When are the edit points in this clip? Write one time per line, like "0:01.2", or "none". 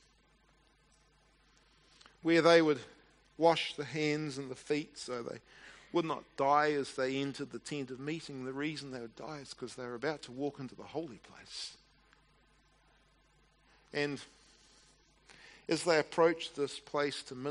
none